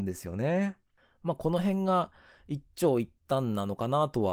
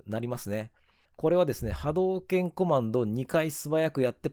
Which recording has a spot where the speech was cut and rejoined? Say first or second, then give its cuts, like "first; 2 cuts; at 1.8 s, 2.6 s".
second; 1 cut; at 1.1 s